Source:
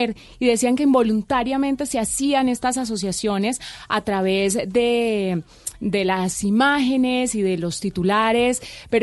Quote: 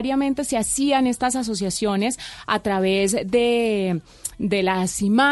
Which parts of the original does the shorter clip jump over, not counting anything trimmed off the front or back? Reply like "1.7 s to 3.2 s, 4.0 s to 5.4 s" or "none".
none